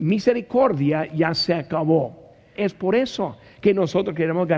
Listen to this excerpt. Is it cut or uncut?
cut